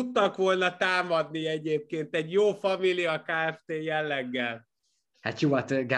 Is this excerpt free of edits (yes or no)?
yes